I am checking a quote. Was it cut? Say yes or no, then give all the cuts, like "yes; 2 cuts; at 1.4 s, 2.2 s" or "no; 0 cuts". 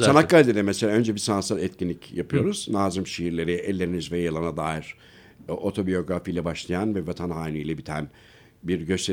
no; 0 cuts